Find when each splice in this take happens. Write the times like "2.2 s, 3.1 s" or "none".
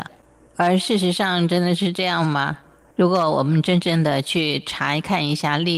2.9 s